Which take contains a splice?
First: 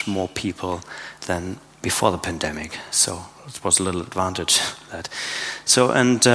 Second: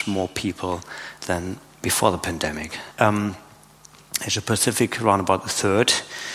second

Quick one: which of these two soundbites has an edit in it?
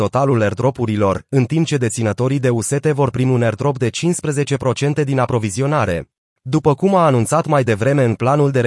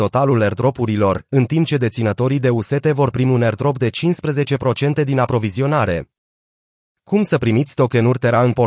first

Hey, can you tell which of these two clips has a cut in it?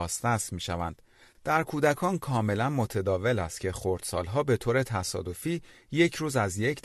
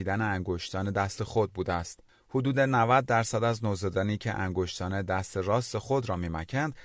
first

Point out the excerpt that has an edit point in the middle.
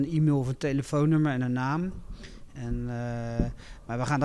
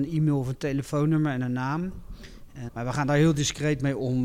second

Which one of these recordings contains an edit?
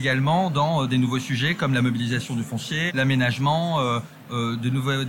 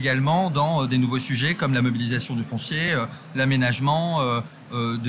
first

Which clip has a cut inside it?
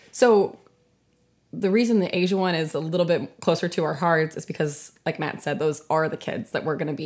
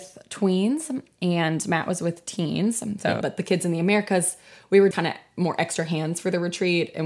second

